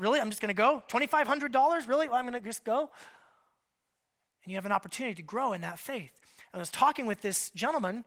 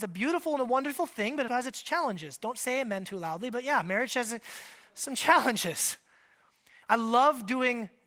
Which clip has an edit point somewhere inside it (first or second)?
second